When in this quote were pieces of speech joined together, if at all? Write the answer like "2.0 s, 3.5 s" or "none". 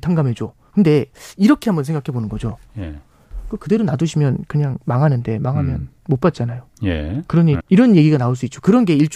6.0 s, 7.6 s